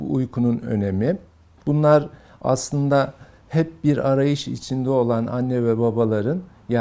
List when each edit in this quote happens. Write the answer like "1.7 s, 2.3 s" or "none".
1.6 s